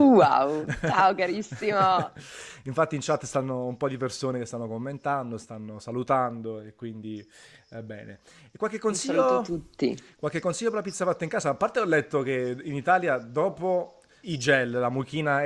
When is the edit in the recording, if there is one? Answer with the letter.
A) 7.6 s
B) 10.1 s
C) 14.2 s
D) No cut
C